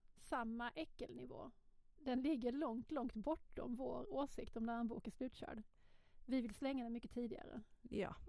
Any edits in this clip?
yes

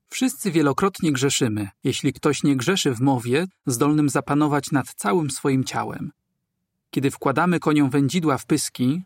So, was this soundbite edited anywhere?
yes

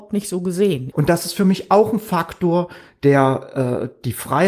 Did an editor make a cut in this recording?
yes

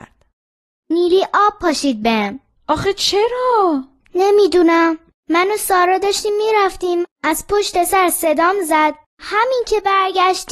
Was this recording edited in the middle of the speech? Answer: no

